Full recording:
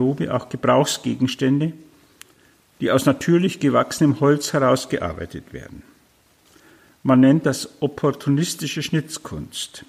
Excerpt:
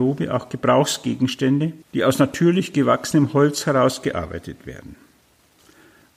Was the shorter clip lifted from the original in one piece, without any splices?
no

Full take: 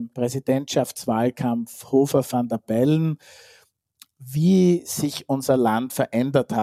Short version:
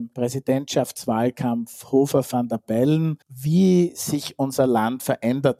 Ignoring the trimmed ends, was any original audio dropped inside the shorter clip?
yes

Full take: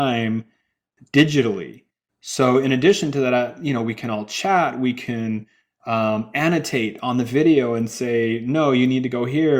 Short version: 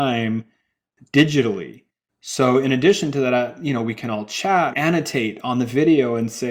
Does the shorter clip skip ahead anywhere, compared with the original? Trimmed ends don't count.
yes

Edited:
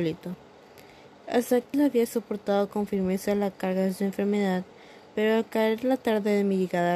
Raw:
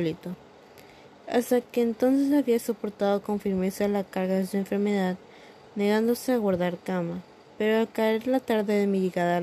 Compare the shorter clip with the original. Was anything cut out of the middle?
yes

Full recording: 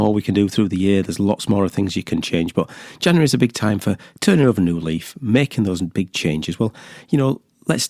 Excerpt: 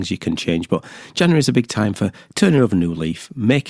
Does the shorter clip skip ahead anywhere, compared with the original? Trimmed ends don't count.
no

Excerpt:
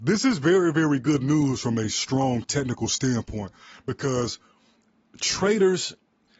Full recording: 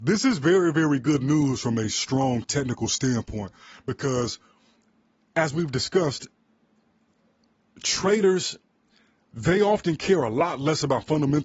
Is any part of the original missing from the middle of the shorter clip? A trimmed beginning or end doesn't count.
yes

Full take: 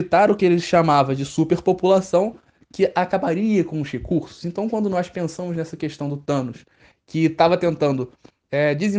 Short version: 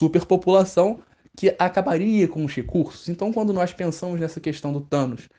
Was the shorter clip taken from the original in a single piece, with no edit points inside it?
yes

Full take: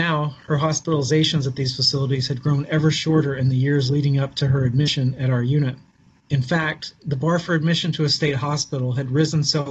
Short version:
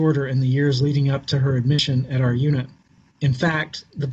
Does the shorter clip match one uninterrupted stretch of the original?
yes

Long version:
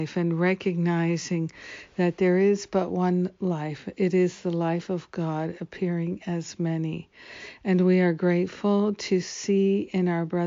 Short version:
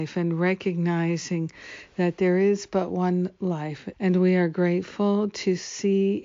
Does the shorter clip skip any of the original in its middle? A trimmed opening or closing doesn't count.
yes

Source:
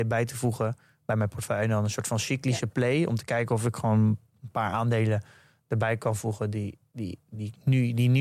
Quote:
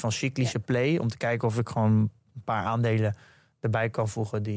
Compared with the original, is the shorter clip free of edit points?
yes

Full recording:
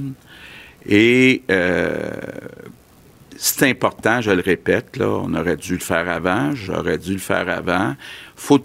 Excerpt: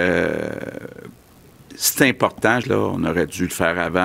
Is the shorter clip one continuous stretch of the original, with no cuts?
no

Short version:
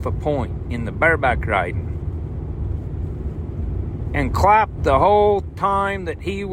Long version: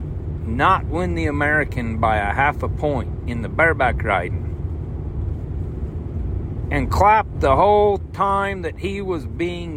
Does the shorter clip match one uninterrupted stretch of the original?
yes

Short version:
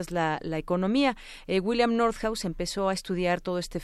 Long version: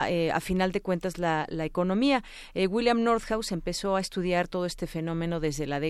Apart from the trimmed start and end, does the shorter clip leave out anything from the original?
no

